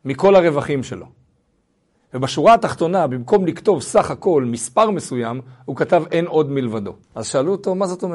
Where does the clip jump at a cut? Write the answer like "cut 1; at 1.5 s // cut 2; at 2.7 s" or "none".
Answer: cut 1; at 7.0 s